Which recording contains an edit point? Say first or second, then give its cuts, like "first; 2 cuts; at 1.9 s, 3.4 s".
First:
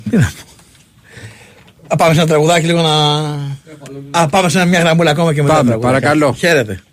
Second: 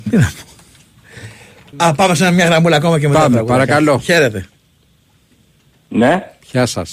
second; 1 cut; at 1.7 s